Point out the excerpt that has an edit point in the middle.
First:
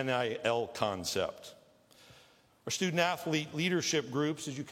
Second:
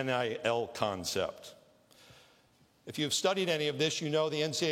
first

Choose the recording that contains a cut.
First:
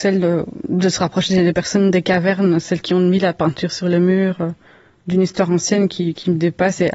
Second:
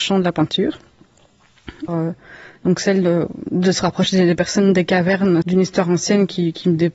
second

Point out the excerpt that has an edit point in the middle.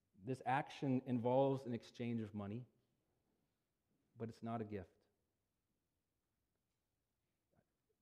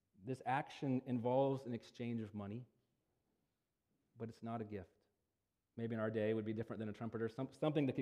second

